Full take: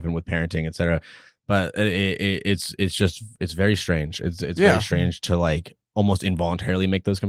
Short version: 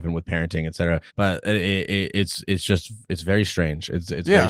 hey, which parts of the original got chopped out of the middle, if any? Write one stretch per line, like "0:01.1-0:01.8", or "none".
0:01.1-0:01.4